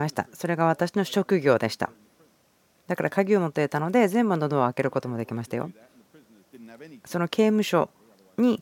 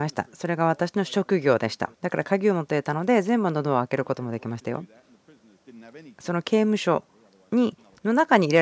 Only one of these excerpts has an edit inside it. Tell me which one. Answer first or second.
second